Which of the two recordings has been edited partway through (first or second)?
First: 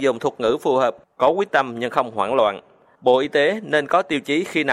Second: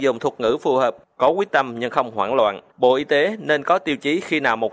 second